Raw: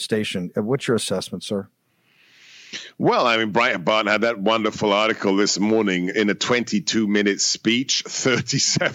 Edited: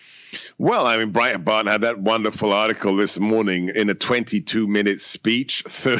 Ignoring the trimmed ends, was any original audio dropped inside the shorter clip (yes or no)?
no